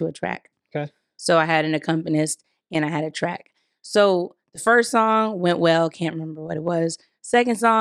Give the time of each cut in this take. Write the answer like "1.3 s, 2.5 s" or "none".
none